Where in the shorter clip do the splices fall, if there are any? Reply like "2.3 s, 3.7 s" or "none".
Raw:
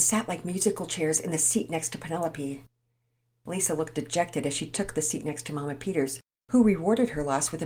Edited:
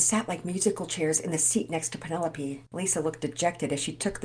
2.7 s

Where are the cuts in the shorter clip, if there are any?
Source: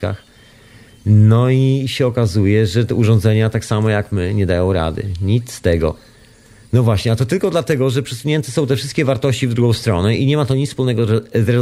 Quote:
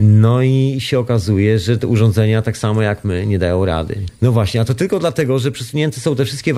4.1 s

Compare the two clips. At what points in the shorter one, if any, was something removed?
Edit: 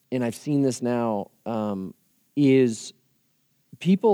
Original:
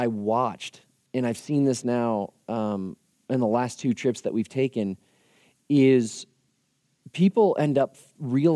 2.2 s

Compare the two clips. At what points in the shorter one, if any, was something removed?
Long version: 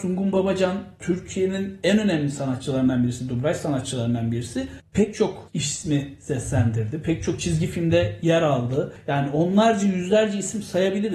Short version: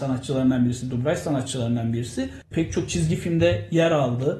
2.5 s

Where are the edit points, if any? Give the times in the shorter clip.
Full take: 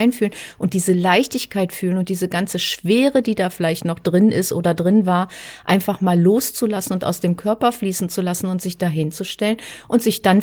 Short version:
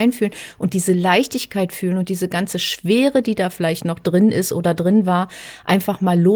none

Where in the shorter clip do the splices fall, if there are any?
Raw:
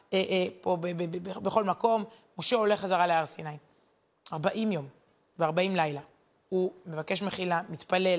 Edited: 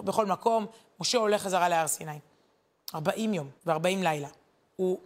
3.6 s

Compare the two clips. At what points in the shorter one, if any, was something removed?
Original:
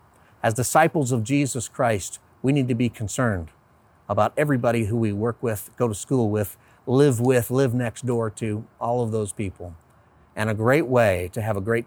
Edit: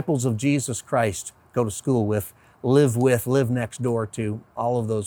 1.5 s

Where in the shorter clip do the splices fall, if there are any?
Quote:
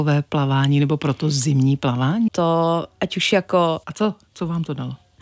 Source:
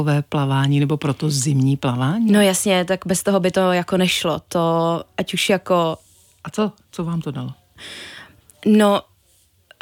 2.3 s, 3.8 s

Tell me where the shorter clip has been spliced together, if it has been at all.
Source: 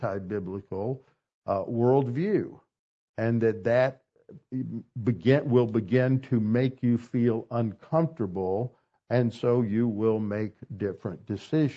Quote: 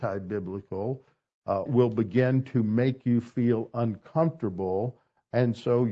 1.7 s

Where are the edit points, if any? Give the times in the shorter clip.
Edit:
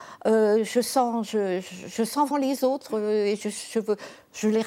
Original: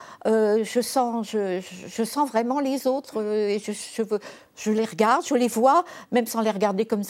2.3 s

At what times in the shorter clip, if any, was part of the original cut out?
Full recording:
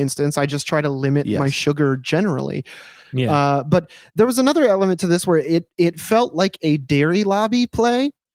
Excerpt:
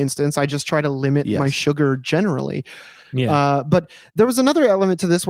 none

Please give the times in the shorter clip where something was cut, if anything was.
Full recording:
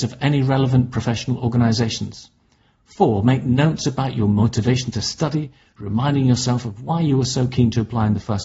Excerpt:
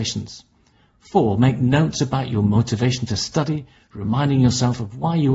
none

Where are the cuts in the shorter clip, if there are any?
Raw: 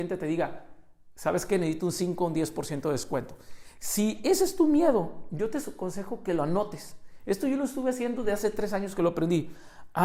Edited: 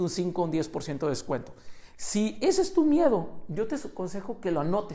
none

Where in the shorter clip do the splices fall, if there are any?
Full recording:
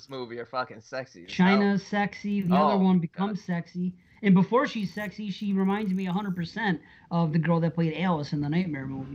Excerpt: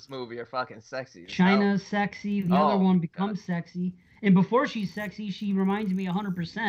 none

